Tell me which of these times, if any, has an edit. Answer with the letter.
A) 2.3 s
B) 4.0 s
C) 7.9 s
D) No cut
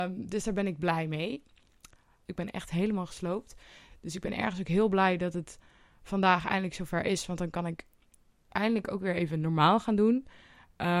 A